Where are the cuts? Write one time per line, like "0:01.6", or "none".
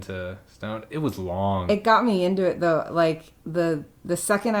none